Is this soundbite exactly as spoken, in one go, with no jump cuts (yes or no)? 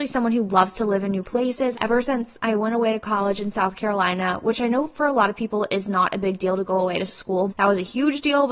no